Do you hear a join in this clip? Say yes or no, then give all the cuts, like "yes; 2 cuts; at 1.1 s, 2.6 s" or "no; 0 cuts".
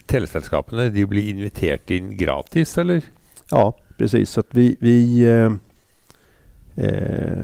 no; 0 cuts